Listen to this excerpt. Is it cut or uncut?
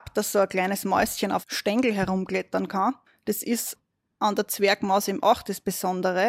cut